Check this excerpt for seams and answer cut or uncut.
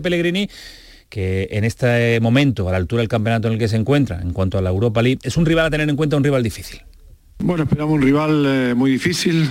uncut